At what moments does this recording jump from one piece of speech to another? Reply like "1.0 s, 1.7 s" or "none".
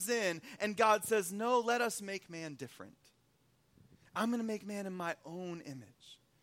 none